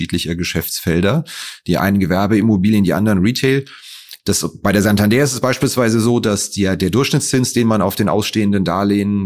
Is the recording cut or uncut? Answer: cut